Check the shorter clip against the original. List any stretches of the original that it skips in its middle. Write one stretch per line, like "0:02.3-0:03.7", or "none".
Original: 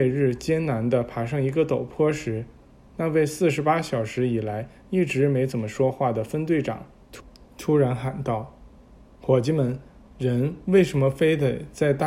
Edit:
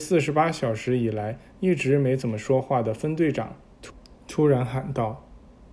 none